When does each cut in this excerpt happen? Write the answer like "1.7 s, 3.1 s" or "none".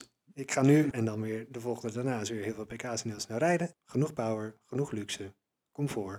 0.9 s, 3.7 s